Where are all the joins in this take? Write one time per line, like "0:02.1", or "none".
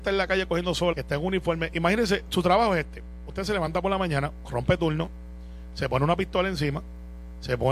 0:00.9